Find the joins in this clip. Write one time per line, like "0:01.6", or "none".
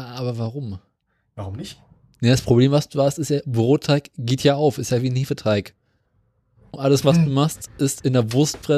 none